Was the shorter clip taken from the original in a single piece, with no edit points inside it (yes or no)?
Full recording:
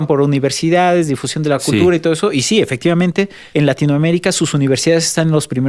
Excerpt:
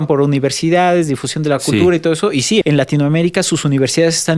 no